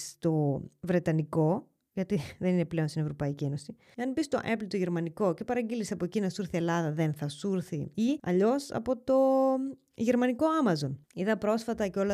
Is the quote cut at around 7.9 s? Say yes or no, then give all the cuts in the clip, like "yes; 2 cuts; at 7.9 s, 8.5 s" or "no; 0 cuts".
yes; 1 cut; at 7.9 s